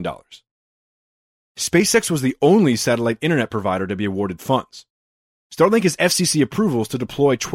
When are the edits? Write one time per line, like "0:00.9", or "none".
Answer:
0:01.4
0:05.4